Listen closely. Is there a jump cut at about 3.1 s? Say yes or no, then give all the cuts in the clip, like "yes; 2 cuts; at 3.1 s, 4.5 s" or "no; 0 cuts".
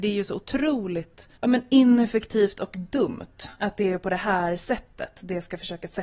no; 1 cut; at 1.4 s